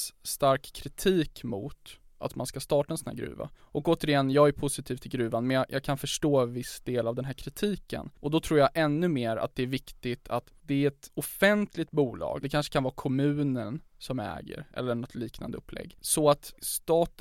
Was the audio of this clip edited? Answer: yes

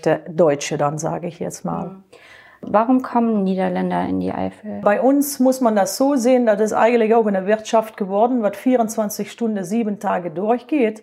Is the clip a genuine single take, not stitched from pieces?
yes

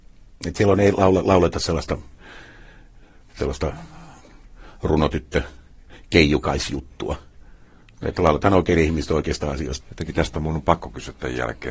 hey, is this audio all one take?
no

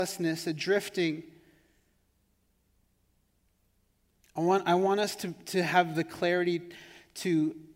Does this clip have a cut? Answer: no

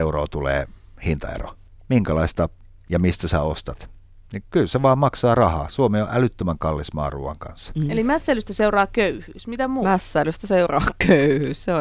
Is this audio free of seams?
yes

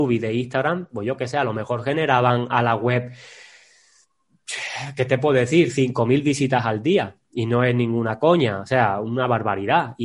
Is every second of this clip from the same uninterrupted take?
yes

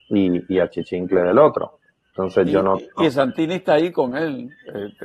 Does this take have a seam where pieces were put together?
no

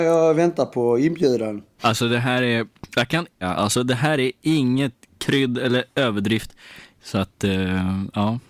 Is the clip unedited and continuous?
no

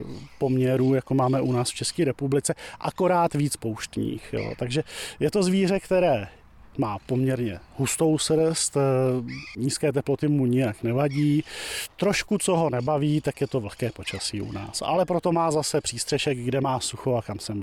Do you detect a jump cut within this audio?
no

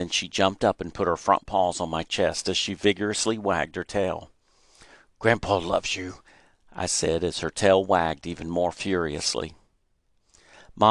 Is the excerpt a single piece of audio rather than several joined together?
yes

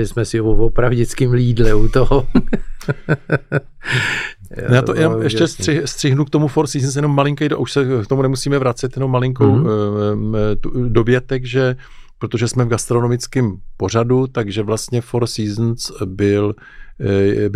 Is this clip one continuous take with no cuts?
yes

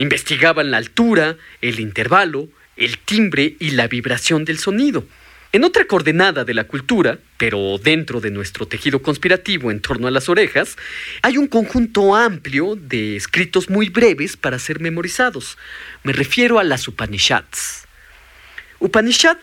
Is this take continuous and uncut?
no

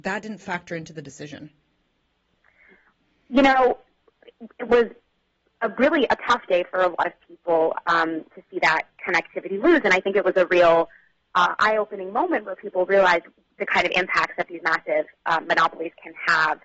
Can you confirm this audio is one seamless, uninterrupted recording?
yes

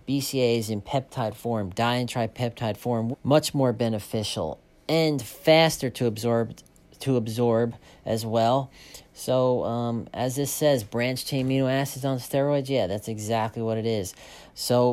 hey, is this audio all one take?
no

